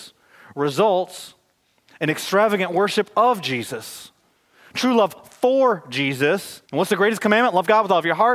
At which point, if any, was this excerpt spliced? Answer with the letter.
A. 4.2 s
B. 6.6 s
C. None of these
B